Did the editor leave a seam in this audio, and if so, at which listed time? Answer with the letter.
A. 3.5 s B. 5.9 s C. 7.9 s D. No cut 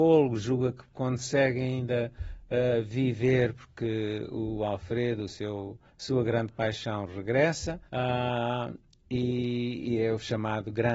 C